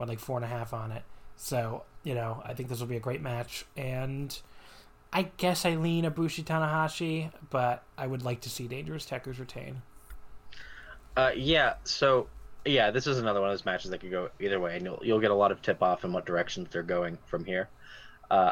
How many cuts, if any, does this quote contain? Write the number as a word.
one